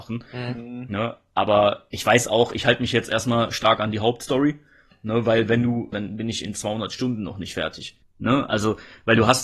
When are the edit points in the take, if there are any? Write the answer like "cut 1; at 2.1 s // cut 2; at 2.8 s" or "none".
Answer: cut 1; at 5.9 s // cut 2; at 8.0 s